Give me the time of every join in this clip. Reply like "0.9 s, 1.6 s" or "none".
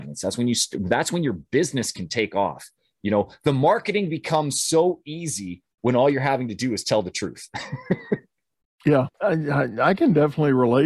9.1 s